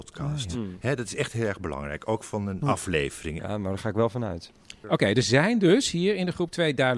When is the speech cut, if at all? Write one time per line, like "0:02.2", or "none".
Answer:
0:03.4
0:04.8